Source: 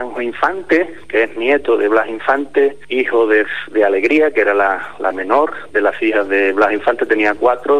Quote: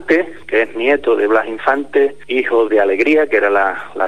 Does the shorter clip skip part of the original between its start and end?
yes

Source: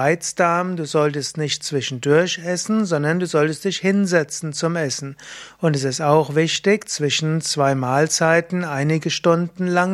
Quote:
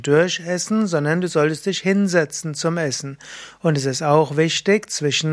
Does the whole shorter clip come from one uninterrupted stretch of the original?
yes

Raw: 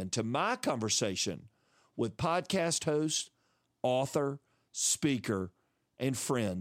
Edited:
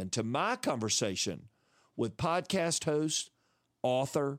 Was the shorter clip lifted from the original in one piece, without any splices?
yes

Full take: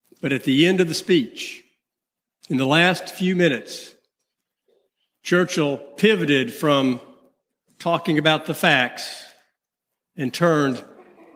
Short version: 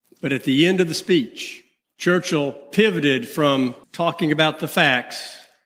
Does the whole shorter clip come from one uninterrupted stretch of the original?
no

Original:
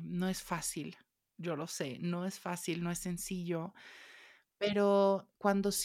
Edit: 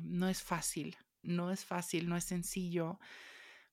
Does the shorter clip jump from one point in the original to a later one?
yes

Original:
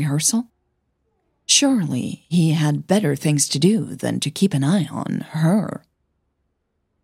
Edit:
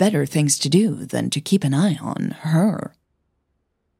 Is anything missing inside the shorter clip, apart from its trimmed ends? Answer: no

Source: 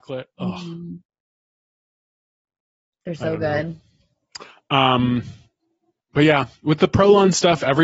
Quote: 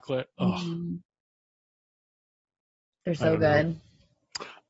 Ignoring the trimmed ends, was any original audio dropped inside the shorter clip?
no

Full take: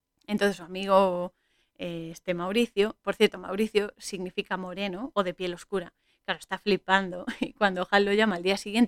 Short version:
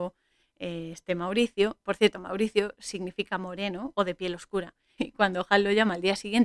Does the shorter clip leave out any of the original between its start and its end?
yes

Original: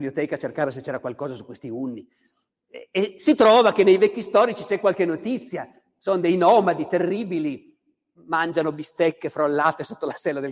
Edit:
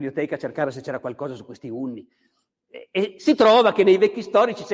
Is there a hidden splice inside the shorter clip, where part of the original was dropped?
no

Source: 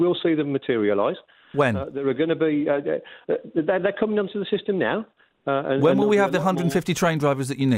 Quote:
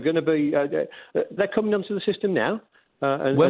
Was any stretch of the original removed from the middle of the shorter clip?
yes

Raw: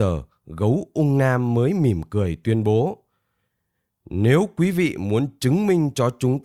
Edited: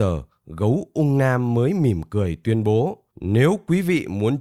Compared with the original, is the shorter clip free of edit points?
no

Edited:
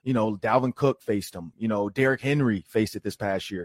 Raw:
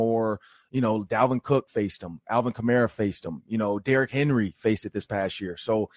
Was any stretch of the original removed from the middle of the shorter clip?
yes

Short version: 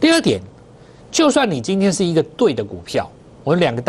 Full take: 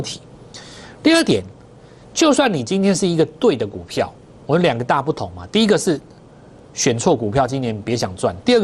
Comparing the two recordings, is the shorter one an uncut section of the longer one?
yes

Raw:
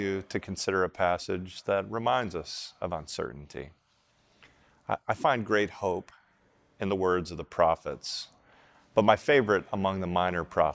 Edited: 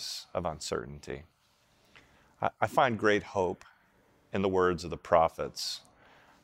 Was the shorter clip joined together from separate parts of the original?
no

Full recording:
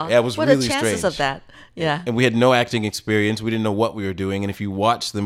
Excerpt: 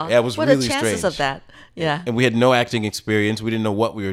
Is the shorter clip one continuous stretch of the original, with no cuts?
yes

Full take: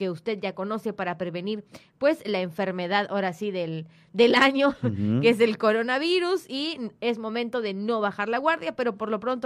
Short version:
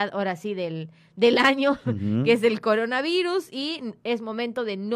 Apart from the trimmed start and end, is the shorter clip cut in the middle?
no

